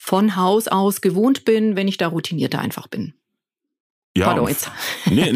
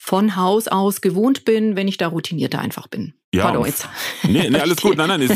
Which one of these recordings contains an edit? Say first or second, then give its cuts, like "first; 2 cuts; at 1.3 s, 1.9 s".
second; 1 cut; at 3.2 s